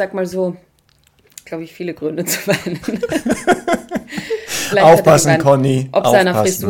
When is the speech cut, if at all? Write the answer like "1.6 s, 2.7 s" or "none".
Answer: 1.5 s